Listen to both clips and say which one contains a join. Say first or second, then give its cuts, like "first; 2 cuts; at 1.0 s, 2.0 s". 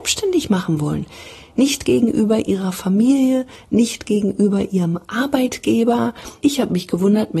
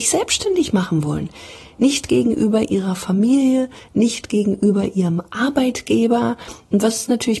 first; 1 cut; at 6.4 s